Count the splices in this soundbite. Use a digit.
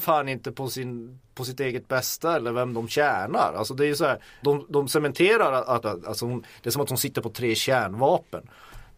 2